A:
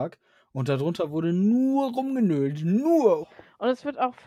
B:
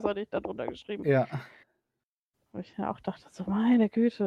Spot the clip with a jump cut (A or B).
A